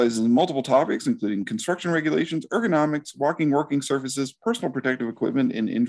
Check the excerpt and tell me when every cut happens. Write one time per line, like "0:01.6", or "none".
none